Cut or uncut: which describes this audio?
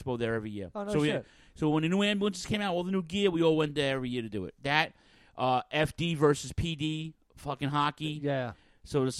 uncut